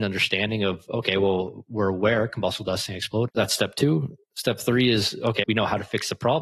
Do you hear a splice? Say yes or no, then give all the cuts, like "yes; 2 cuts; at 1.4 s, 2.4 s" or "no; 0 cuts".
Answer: yes; 2 cuts; at 3.3 s, 5.4 s